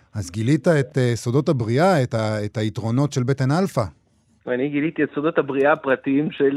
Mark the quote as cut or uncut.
uncut